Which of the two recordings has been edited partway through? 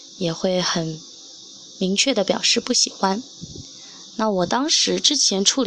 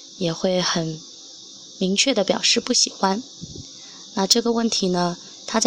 first; 1 cut; at 4.1 s

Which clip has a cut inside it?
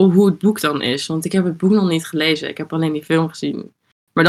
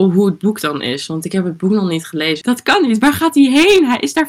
second; 1 cut; at 2.4 s

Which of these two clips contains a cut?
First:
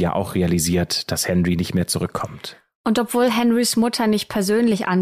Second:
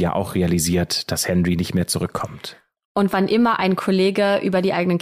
second; 1 cut; at 2.8 s

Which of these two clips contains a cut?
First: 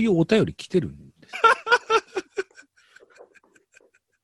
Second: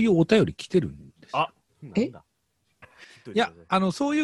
first; 1 cut; at 1.3 s

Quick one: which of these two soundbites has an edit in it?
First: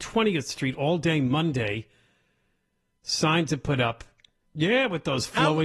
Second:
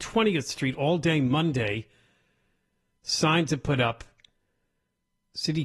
first; 1 cut; at 4.4 s

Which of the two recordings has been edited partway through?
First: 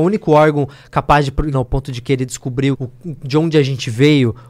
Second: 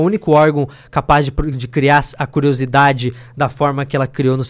first; 2 cuts; at 1.5 s, 2.7 s

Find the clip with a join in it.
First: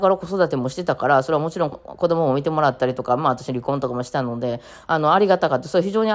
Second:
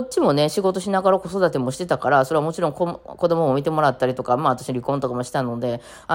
first; 1 cut; at 1.7 s

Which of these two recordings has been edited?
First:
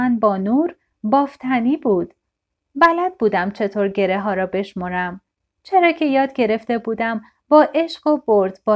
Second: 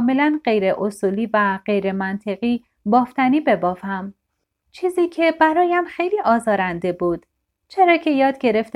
first; 2 cuts; at 2.5 s, 5.4 s

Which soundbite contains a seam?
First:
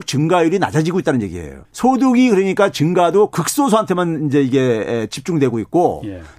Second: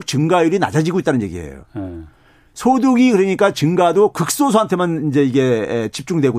first; 1 cut; at 1.6 s

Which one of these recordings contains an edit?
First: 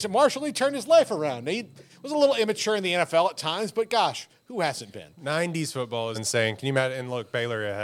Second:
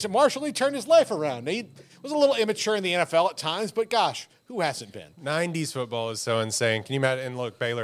first; 1 cut; at 6.1 s

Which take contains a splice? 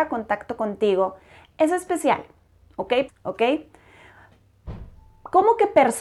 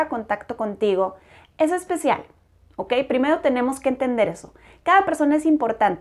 first; 1 cut; at 3.1 s

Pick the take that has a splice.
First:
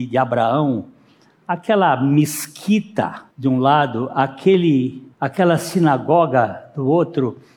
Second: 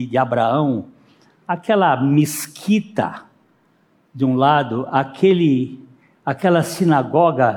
first; 2 cuts; at 3.3 s, 5.1 s

